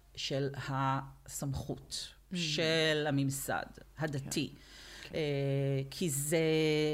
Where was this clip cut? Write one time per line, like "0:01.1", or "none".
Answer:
none